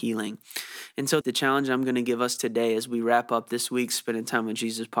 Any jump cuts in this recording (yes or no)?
yes